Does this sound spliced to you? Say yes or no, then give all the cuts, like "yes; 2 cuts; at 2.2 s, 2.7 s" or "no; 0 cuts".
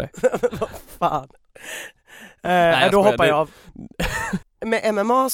yes; 1 cut; at 4.4 s